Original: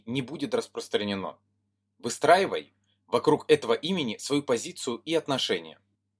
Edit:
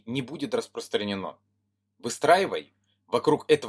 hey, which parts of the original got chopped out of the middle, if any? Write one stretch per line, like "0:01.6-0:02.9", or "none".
none